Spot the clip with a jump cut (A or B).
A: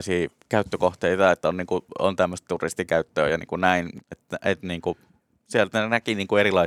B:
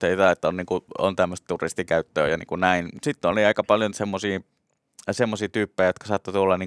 A